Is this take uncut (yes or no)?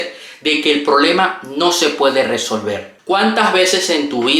yes